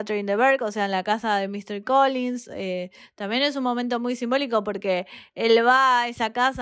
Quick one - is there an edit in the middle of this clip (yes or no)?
no